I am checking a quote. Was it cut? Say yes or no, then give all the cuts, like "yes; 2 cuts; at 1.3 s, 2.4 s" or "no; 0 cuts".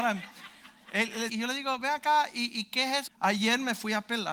yes; 2 cuts; at 1.3 s, 3.1 s